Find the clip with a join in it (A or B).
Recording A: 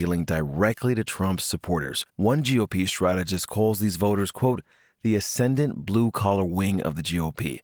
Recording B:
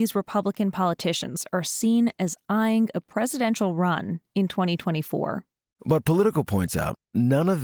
A